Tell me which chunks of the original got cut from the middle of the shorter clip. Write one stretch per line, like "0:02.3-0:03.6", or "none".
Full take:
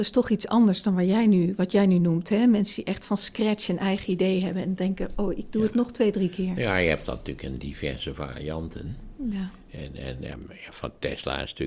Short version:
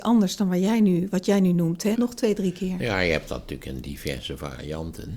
0:02.4-0:05.7